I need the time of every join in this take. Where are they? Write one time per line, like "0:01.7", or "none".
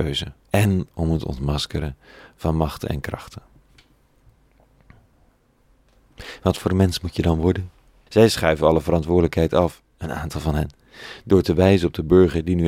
0:08.1